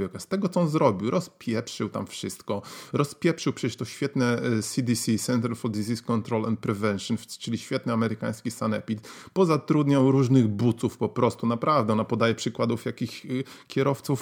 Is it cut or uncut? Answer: uncut